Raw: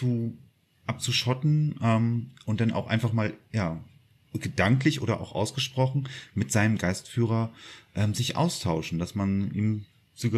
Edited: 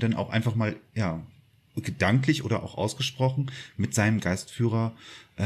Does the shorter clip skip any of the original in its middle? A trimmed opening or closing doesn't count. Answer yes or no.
no